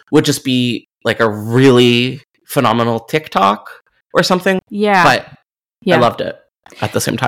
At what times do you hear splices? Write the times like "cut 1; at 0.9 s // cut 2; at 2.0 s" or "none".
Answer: cut 1; at 4.6 s